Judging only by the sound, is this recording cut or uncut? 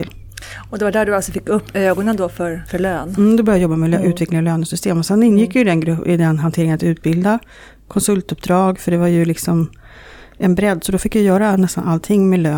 uncut